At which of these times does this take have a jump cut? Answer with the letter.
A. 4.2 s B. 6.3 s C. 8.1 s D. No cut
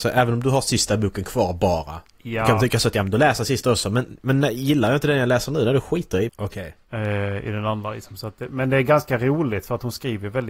B